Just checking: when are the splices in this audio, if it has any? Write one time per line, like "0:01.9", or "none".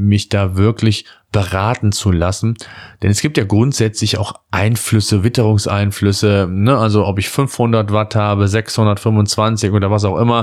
none